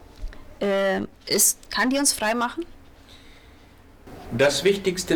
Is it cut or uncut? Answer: cut